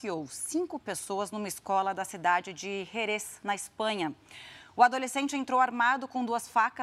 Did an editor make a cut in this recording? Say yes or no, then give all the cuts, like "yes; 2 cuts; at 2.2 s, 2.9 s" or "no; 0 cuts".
no; 0 cuts